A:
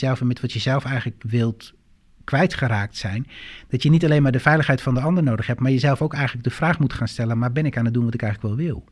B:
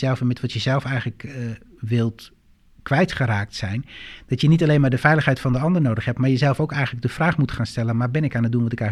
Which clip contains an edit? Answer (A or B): A